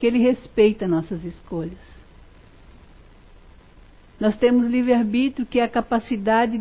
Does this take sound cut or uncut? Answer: uncut